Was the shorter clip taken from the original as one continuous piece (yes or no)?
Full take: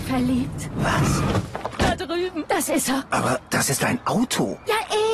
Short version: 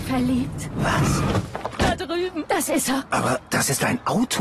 yes